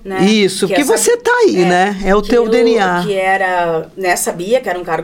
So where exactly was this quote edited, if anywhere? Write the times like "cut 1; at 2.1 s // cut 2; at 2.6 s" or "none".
none